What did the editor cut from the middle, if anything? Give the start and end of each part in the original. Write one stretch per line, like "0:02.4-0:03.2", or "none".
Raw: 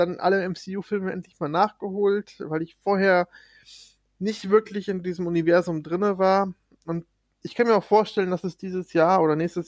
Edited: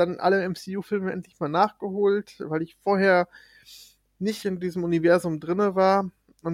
0:04.4-0:04.8

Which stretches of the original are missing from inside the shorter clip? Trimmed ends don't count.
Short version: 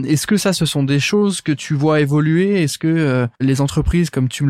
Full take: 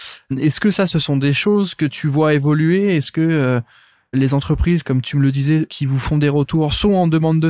0:03.7-0:04.1

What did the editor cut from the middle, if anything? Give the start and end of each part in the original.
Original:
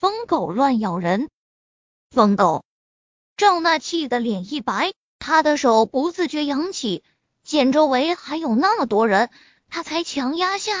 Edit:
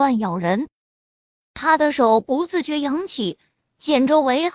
0:02.0-0:05.1

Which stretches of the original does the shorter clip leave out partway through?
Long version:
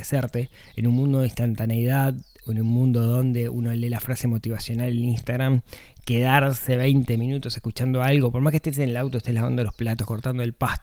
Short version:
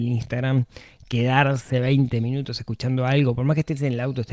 none

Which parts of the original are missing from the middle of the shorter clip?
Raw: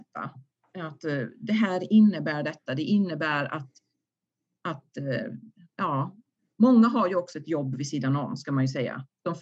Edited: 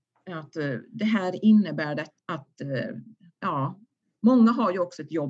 0:02.7-0:04.6

